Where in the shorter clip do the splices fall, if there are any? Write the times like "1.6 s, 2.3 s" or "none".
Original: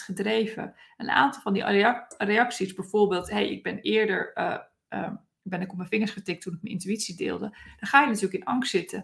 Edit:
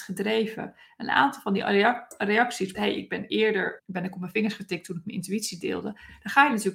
2.7 s, 3.8 s